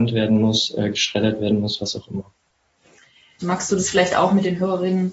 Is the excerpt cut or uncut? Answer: cut